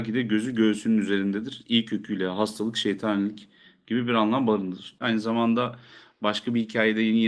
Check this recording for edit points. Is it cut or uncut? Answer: cut